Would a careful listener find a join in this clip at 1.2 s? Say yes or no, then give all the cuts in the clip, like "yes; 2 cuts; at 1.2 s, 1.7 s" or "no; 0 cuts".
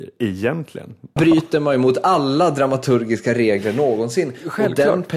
yes; 1 cut; at 1.2 s